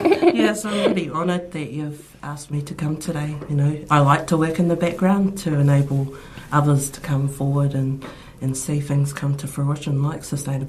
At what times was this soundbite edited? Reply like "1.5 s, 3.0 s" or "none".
3.9 s